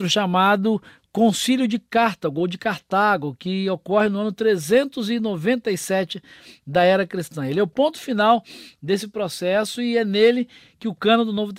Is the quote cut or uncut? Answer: uncut